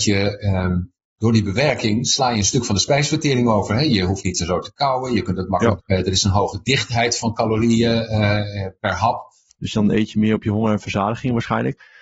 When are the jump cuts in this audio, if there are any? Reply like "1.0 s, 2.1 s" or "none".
5.8 s, 9.5 s